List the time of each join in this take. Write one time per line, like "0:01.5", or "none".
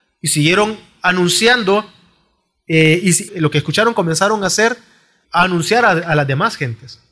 0:03.3
0:05.2